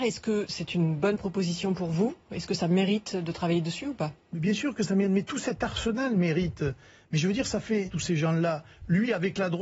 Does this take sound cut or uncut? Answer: cut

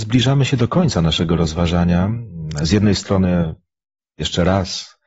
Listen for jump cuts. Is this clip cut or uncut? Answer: uncut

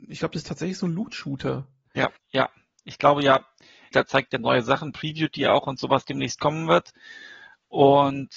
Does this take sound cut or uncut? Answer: cut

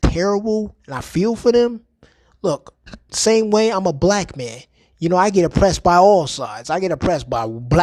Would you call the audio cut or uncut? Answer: uncut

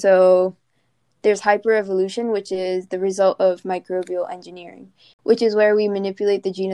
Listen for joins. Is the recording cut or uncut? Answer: uncut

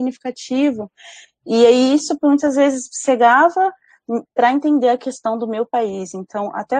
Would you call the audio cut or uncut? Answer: uncut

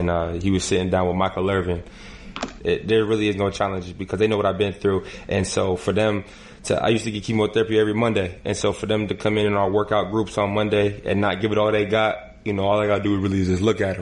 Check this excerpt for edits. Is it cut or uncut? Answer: cut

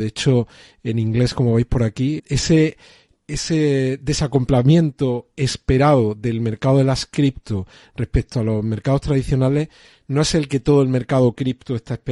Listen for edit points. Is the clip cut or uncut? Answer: cut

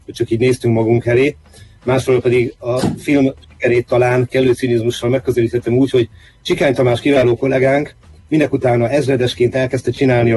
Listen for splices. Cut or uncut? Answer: uncut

